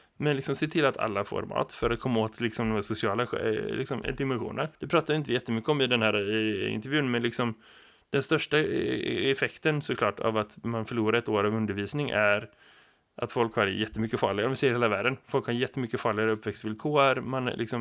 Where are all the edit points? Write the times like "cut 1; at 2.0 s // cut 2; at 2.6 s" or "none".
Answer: cut 1; at 4.7 s